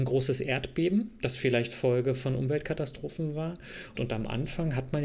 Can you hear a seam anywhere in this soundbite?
yes; 1 cut; at 3.9 s

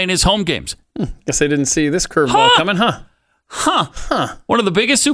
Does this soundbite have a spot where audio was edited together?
no; 0 cuts

